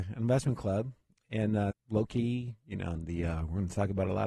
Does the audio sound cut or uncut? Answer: cut